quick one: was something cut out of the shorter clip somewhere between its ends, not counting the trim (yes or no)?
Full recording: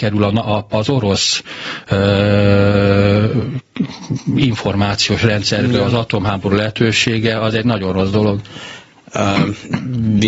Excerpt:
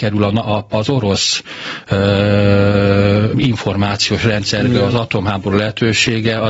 yes